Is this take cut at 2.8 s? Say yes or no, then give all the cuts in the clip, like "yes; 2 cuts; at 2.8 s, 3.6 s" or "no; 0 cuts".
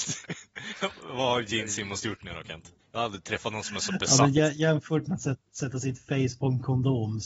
yes; 1 cut; at 2.8 s